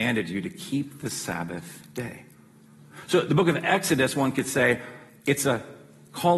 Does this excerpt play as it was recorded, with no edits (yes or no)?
yes